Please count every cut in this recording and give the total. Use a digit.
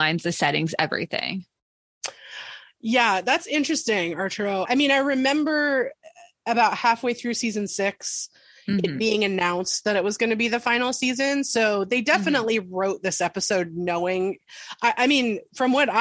1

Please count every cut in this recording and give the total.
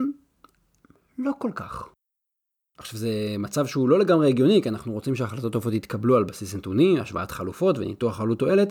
0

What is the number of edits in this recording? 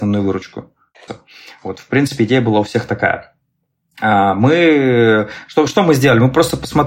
1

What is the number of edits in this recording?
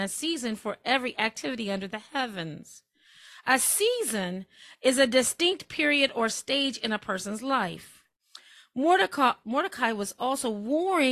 1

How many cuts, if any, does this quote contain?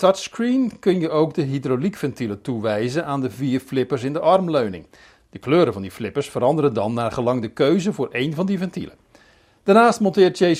0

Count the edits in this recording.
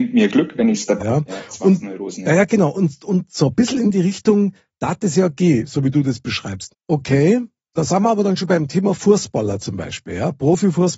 2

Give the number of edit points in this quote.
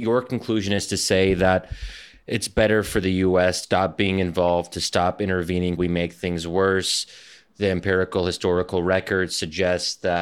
2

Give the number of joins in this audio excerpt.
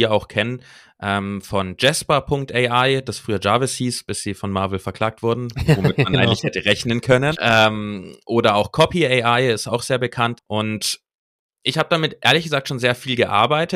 2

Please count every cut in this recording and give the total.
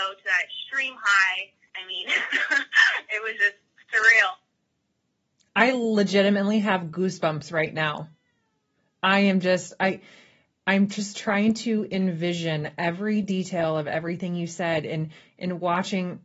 1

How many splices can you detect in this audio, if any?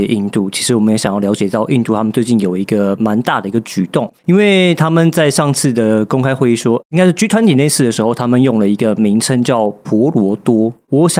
1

